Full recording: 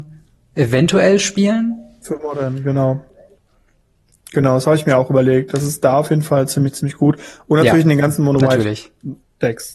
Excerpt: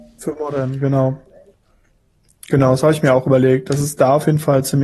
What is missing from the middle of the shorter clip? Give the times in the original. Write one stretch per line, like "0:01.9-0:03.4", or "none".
none